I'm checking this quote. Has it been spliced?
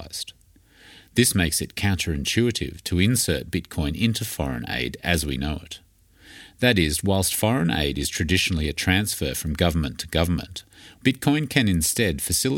yes; 1 cut; at 11.0 s

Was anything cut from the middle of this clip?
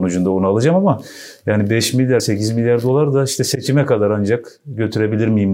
yes; 1 cut; at 2.2 s

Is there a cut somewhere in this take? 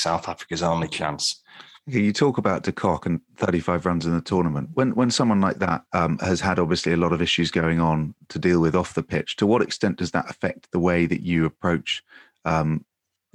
yes; 1 cut; at 5.9 s

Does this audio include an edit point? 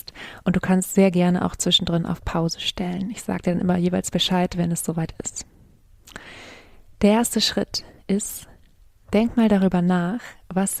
no; 0 cuts

